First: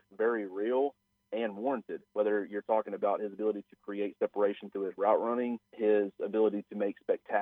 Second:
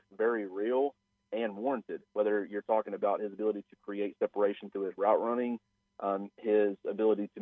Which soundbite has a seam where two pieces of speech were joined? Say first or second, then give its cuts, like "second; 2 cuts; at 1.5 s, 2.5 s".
first; 1 cut; at 5.7 s